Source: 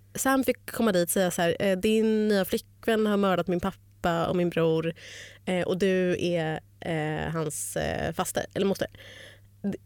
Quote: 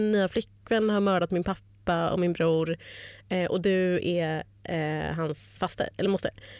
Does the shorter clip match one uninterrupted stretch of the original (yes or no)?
no